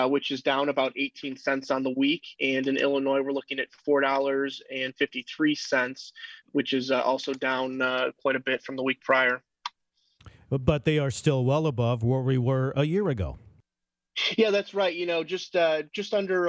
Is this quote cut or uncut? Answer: cut